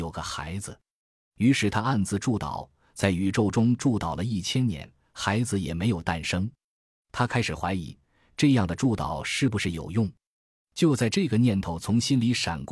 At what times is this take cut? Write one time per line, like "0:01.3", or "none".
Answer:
none